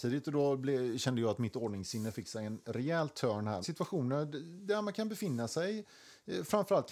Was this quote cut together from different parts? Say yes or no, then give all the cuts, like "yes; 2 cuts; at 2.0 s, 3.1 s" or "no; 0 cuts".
yes; 1 cut; at 3.6 s